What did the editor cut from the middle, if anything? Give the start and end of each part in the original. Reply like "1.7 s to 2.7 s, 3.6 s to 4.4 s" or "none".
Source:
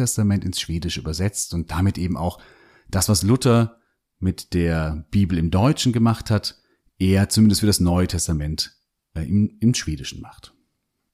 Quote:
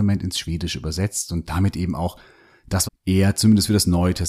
3.1 s to 6.8 s